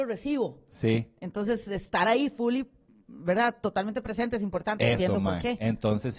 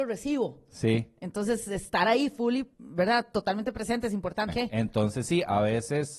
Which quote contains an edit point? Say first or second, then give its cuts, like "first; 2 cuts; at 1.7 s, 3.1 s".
second; 2 cuts; at 2.7 s, 4.5 s